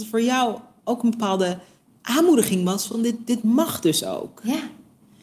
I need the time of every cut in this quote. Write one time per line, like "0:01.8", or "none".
none